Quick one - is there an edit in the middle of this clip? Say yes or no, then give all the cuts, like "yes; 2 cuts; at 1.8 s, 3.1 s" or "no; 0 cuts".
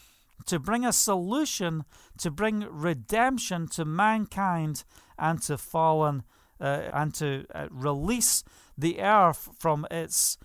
yes; 1 cut; at 6.9 s